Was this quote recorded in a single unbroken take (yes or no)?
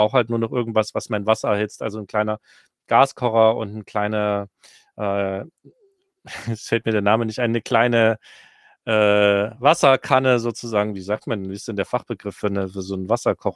yes